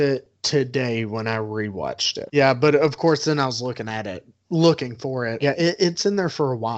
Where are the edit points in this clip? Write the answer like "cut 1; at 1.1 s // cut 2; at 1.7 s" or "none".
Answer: cut 1; at 2.3 s // cut 2; at 5.4 s